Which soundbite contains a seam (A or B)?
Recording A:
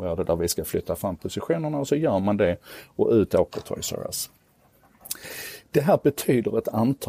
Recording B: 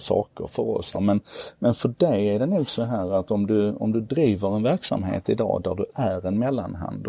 B